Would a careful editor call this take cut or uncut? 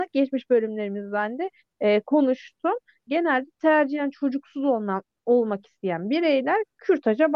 cut